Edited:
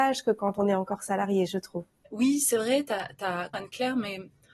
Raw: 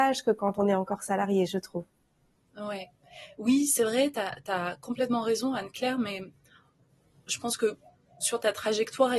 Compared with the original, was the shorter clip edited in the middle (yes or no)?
yes